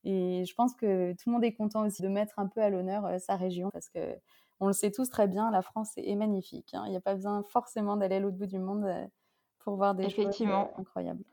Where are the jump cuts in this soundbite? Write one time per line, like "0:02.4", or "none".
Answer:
0:02.0
0:03.7